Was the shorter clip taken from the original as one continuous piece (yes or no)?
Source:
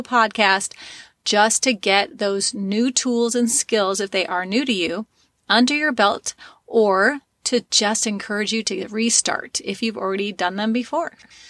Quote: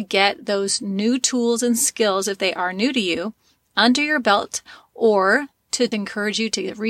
no